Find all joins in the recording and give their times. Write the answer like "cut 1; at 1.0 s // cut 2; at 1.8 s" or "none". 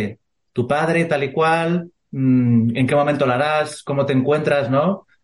none